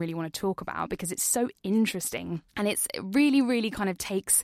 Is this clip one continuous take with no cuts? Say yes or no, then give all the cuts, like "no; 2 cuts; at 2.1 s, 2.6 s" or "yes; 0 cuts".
no; 1 cut; at 2.5 s